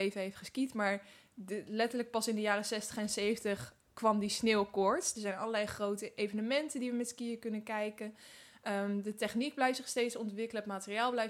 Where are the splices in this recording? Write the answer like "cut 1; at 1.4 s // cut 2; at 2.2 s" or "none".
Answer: cut 1; at 5.1 s